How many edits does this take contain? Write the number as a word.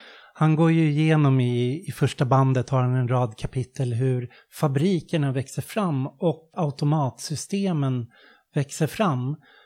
one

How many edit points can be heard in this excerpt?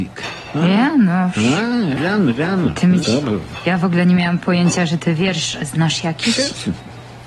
two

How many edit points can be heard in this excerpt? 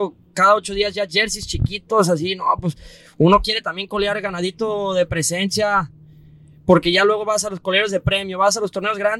zero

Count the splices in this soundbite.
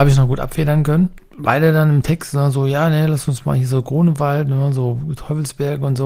zero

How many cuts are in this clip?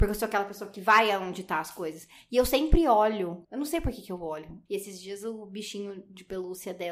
two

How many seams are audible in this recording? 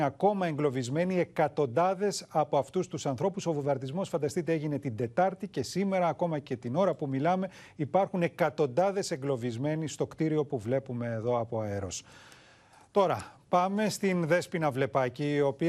zero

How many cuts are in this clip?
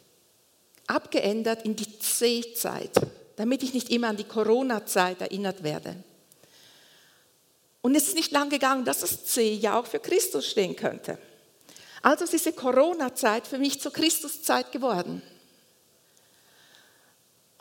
one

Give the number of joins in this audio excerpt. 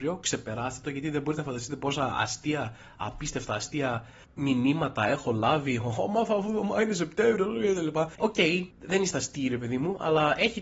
one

